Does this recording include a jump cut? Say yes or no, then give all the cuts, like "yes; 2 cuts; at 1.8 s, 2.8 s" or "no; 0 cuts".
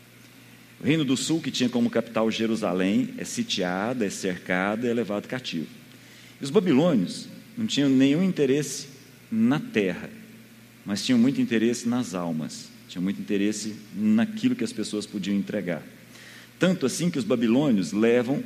no; 0 cuts